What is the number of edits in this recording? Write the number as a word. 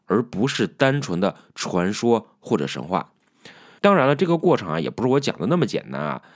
one